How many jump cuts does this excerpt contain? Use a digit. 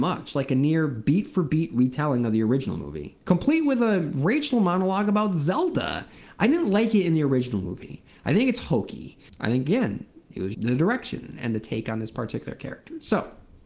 3